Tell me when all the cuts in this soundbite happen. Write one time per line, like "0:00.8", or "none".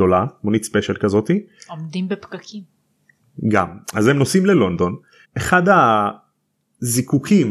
0:05.2